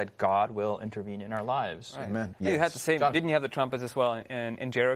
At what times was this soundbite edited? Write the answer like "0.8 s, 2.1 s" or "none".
2.3 s